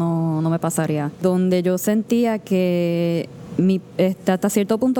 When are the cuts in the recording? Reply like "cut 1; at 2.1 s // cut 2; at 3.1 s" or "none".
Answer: none